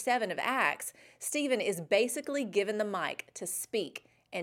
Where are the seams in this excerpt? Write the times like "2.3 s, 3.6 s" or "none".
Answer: none